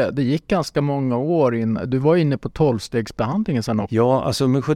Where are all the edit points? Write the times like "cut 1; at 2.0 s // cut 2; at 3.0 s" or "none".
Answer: none

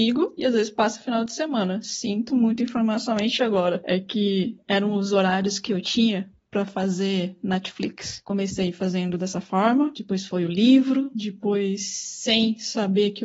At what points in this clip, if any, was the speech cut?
none

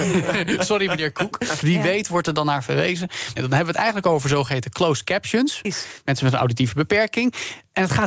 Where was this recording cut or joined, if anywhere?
cut 1; at 1.6 s // cut 2; at 3.4 s // cut 3; at 5.6 s

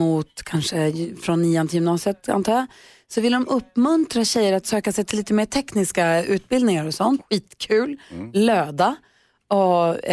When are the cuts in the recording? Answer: cut 1; at 7.2 s

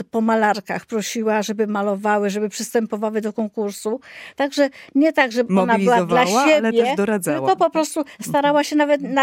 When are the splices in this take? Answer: cut 1; at 4.3 s

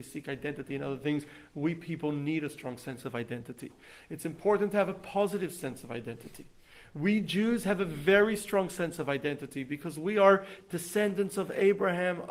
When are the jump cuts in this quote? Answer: none

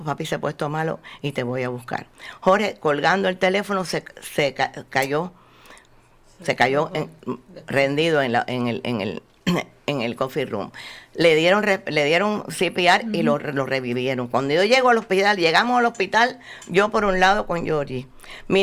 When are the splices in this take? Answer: none

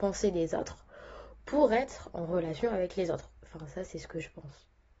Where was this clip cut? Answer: cut 1; at 3.4 s

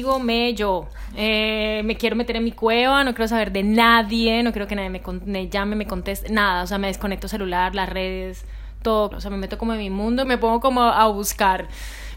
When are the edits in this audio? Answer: cut 1; at 9.1 s // cut 2; at 10.2 s

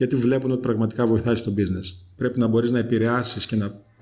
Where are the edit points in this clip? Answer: cut 1; at 2.2 s

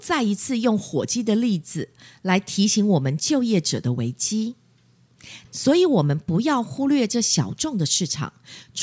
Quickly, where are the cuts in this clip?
cut 1; at 5.5 s

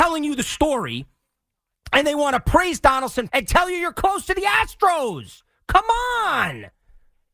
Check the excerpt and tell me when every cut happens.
cut 1; at 3.3 s

